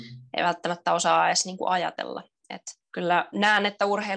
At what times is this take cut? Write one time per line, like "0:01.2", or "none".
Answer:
0:02.8